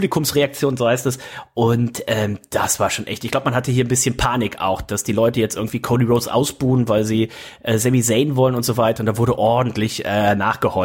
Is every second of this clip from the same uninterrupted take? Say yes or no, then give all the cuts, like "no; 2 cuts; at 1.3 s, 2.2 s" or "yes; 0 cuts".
yes; 0 cuts